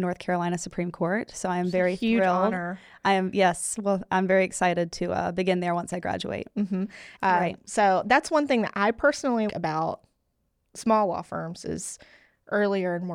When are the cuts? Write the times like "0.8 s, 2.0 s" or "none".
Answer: 7.2 s, 9.5 s